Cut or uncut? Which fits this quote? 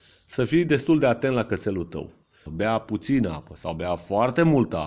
cut